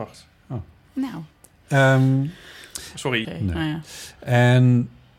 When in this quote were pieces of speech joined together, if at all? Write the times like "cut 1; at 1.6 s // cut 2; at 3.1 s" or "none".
cut 1; at 3.2 s